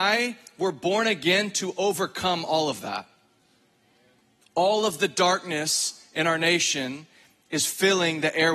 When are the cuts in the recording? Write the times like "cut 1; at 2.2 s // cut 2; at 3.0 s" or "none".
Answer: cut 1; at 4.4 s